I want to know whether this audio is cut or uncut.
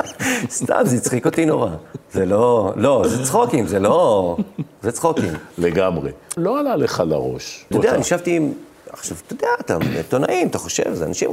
cut